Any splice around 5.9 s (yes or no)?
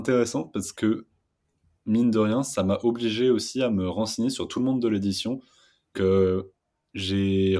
yes